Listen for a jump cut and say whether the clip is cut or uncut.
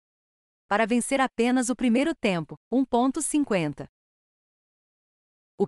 cut